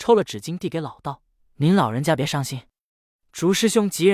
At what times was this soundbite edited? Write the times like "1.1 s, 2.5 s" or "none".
1.4 s